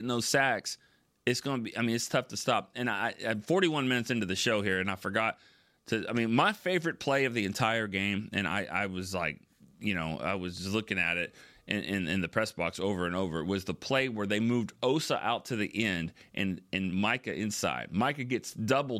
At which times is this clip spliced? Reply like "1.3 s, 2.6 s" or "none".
none